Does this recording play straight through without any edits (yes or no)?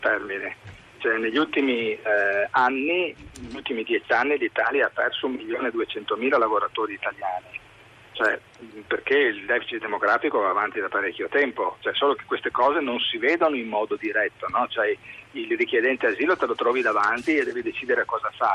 yes